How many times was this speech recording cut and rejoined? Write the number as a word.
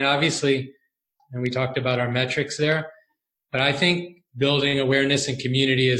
one